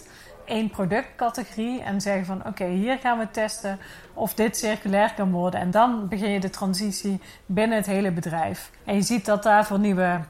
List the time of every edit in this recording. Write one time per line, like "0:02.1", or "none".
0:08.8